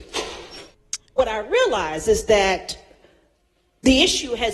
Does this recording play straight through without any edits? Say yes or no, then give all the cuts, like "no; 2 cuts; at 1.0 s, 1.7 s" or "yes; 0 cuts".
no; 1 cut; at 1.1 s